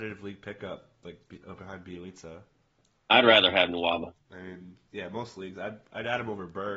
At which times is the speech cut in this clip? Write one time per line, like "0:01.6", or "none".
0:04.3